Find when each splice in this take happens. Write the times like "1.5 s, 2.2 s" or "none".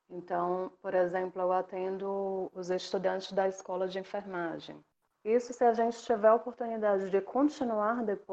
none